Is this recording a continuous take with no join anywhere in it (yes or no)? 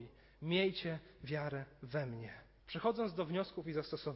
no